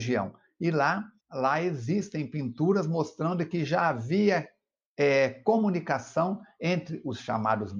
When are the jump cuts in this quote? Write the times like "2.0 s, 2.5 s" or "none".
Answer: 1.2 s